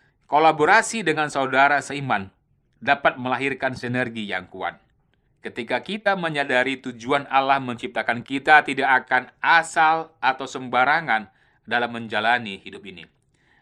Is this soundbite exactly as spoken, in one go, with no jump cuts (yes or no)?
no